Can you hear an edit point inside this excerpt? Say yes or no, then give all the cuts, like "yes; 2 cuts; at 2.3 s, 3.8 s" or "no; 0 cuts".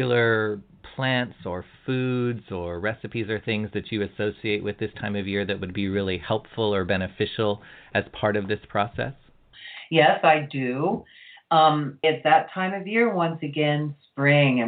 yes; 1 cut; at 12.0 s